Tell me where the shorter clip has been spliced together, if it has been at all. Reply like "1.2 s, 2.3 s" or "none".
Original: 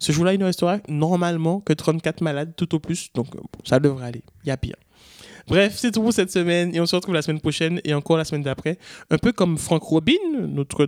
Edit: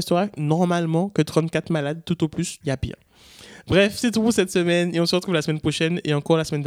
2.6 s